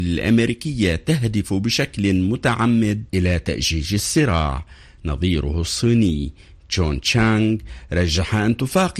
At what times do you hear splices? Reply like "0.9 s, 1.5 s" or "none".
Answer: 3.1 s